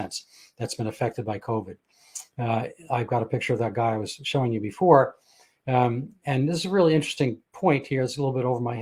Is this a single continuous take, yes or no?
yes